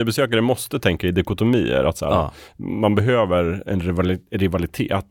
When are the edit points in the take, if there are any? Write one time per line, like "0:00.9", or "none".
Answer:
none